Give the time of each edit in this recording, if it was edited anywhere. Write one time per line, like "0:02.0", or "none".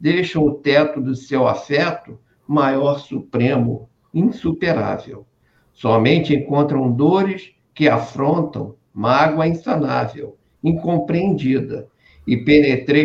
none